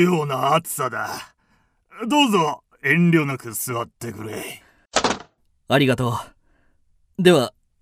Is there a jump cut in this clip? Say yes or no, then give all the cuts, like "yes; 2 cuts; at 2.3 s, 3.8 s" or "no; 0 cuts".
no; 0 cuts